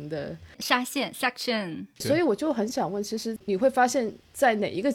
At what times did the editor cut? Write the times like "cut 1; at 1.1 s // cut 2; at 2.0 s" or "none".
cut 1; at 2.0 s // cut 2; at 3.4 s